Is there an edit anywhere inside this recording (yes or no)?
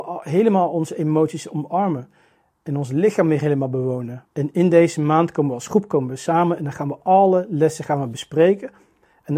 yes